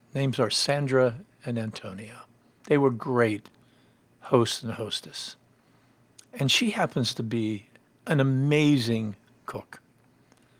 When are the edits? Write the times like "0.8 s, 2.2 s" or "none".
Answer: none